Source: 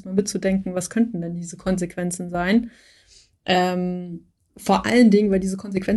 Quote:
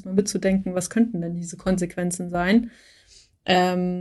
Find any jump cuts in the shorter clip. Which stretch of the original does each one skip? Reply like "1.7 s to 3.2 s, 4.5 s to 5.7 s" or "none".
none

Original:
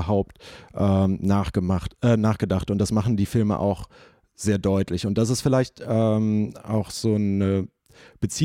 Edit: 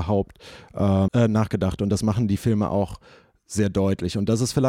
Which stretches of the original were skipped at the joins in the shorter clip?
1.1 s to 2.0 s

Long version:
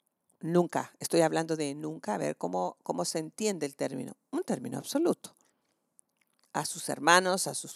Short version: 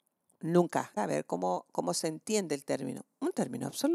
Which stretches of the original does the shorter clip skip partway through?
1.0 s to 2.1 s

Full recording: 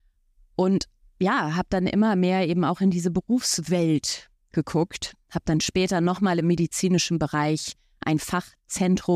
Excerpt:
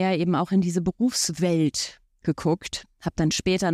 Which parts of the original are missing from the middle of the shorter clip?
none

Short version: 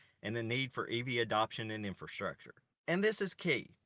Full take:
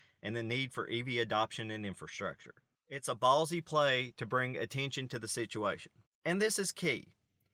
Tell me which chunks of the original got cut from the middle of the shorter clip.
2.7 s to 6.1 s

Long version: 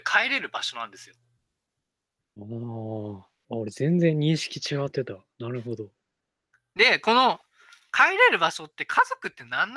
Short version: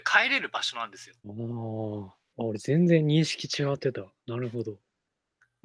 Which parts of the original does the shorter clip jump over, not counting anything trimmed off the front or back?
1.2 s to 2.3 s

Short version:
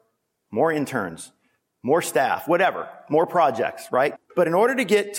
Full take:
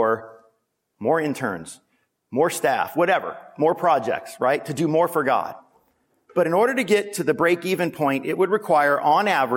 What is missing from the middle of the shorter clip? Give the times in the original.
4.6 s to 6.1 s

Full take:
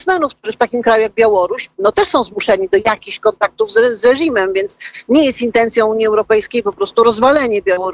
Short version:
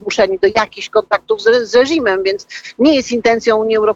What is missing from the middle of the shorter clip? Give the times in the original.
none

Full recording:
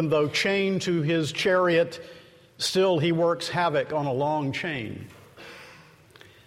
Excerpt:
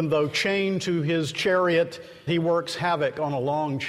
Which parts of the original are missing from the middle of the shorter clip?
2.3 s to 3.0 s

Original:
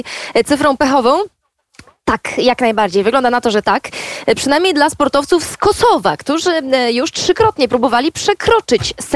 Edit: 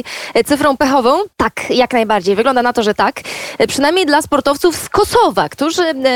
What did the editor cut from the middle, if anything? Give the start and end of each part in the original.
1.3 s to 2.0 s

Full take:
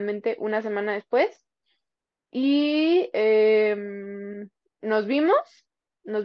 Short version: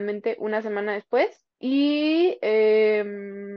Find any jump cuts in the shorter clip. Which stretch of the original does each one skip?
1.5 s to 2.2 s

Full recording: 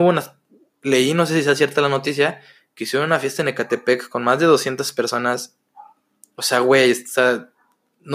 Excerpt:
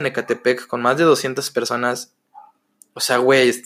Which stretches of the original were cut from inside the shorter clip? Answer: none

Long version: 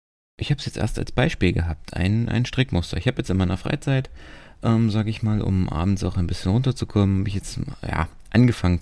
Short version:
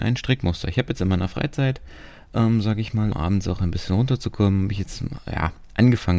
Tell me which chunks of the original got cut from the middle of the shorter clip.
5.4 s to 5.7 s

